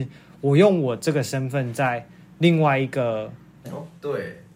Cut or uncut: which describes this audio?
cut